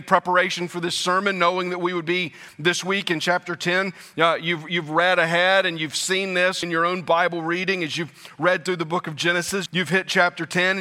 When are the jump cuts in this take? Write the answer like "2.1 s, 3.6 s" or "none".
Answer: 6.6 s, 9.7 s